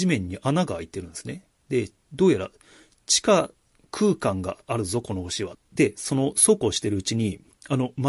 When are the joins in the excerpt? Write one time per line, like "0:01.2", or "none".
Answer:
0:05.5